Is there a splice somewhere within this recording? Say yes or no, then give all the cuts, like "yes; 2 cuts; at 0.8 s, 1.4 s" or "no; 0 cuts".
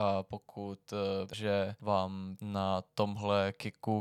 yes; 1 cut; at 1.3 s